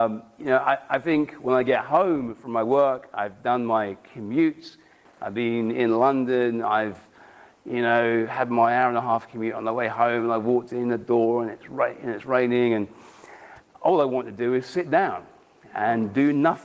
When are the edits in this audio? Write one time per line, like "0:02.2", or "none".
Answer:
none